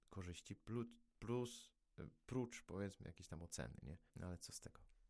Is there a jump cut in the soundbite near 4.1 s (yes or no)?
yes